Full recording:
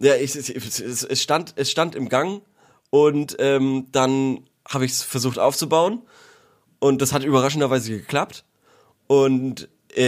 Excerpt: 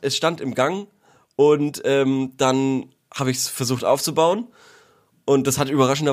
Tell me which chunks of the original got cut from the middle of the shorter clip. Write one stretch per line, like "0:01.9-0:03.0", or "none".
none